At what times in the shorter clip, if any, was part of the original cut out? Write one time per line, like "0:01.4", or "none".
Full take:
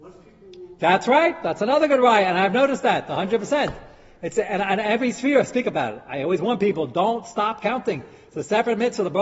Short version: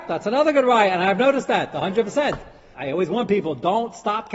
0:02.7